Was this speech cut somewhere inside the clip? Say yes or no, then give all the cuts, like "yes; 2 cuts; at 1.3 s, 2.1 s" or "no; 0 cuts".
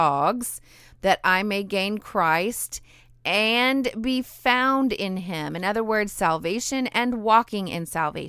no; 0 cuts